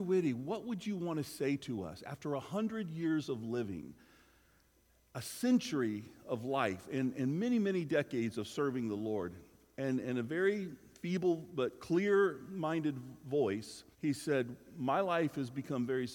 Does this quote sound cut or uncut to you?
cut